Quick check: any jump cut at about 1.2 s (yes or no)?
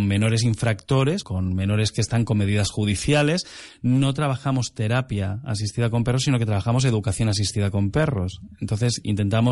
yes